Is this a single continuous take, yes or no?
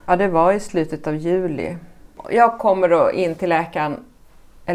yes